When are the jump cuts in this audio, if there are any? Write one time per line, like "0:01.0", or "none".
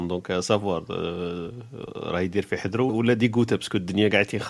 0:02.9